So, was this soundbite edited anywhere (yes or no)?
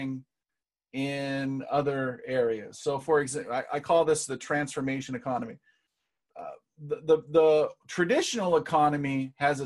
no